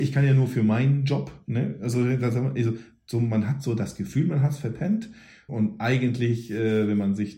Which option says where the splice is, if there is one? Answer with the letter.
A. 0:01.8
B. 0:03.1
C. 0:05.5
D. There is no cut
C